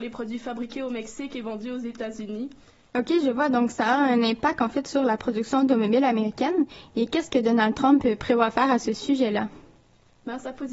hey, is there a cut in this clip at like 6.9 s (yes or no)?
no